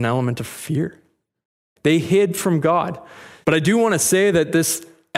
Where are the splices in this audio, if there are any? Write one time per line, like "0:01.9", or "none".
0:01.8
0:03.4